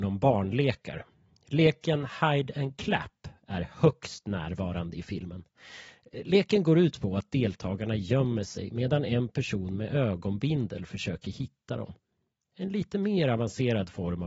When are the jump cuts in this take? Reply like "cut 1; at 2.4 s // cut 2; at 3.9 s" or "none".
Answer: none